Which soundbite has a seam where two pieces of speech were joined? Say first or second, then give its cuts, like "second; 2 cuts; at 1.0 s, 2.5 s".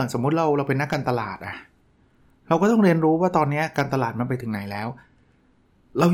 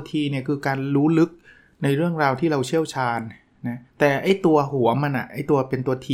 second; 1 cut; at 3.9 s